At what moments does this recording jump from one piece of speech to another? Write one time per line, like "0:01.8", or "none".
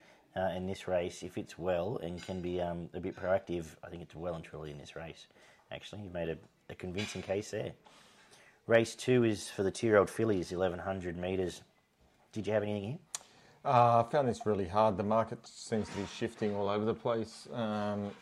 none